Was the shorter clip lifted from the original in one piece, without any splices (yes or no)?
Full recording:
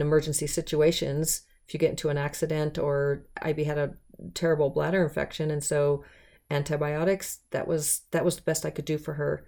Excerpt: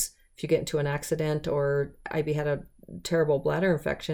yes